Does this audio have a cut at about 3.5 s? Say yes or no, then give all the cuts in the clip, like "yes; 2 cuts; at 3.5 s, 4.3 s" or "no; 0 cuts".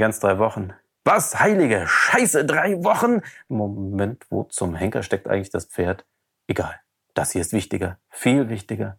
yes; 1 cut; at 3.5 s